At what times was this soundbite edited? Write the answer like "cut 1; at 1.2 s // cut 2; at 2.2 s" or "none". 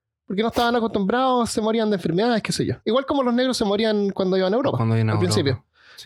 none